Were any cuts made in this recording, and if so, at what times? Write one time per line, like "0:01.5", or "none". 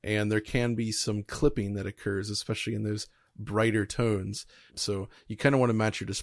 0:04.7